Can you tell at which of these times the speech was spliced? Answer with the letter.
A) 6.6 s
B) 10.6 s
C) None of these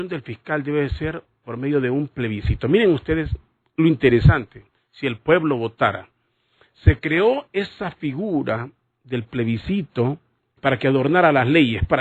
B